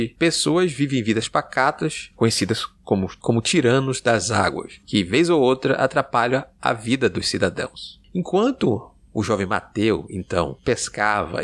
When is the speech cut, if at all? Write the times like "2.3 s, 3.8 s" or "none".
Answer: 2.1 s